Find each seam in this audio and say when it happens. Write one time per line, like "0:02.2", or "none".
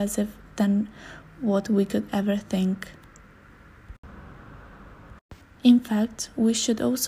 0:05.6